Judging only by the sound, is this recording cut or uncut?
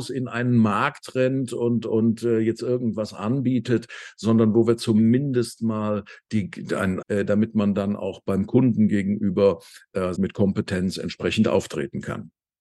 cut